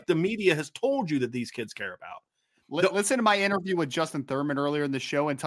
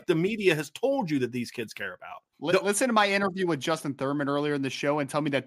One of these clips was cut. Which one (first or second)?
second